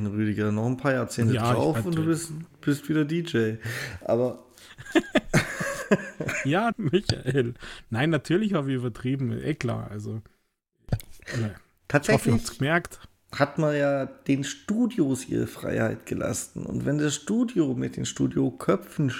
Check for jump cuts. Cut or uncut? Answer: cut